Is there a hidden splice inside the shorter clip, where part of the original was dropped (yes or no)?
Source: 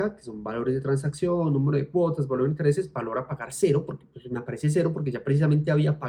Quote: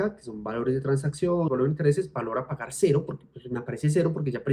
yes